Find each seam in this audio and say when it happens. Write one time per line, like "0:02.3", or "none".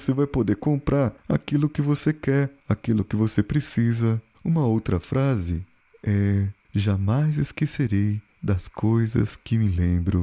none